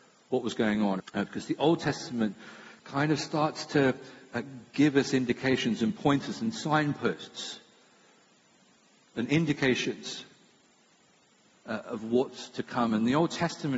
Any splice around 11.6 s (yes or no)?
no